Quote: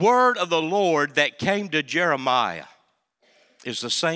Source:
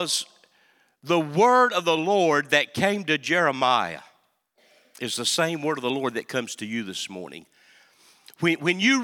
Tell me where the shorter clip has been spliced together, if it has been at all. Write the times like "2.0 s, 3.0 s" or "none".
none